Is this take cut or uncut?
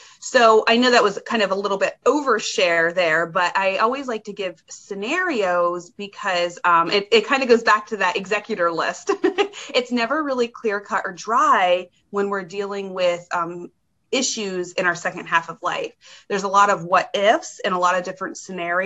uncut